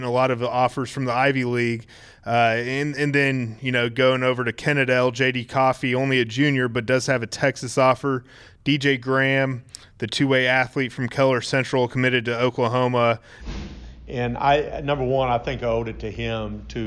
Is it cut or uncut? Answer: cut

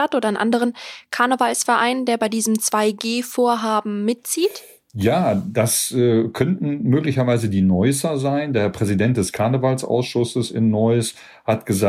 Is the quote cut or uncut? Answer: uncut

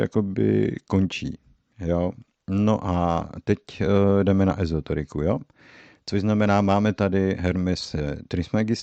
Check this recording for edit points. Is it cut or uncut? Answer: uncut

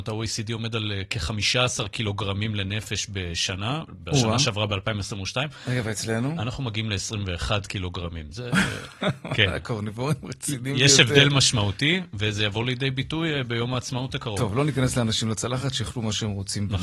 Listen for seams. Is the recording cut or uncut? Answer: uncut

